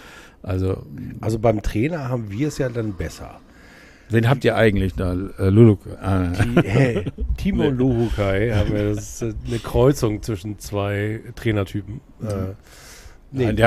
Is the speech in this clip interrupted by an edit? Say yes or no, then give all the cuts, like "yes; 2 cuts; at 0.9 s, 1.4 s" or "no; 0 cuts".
no; 0 cuts